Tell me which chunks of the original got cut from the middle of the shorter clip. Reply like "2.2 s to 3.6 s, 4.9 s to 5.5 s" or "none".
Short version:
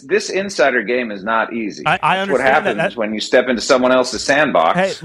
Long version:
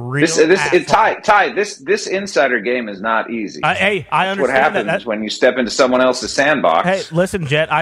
3.7 s to 4.1 s